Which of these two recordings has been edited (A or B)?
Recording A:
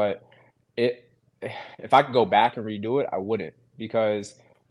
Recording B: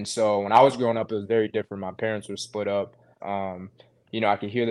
B